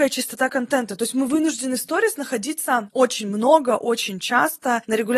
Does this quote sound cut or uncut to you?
uncut